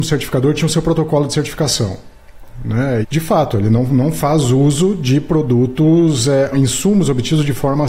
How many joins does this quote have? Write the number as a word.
two